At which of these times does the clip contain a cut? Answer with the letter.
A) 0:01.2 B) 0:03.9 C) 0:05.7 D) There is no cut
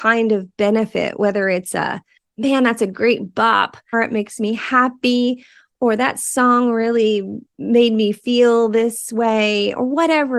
B